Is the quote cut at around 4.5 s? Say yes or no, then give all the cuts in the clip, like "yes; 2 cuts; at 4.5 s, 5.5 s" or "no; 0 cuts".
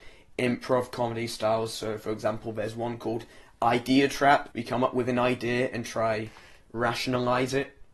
yes; 1 cut; at 4.5 s